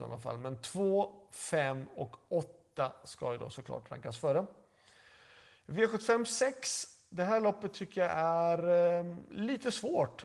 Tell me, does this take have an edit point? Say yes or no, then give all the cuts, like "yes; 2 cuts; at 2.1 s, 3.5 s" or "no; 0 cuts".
no; 0 cuts